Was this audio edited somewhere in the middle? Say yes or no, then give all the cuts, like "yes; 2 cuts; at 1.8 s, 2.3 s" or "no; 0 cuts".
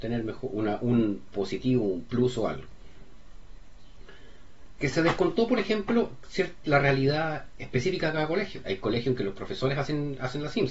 yes; 3 cuts; at 4.8 s, 6.6 s, 8.6 s